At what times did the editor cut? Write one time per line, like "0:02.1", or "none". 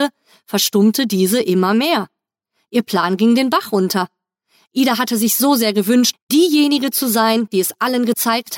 0:06.1